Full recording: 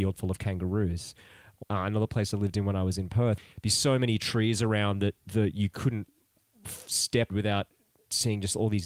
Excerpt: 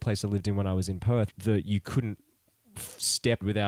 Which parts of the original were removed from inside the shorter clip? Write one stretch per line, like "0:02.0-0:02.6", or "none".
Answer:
0:03.4-0:05.2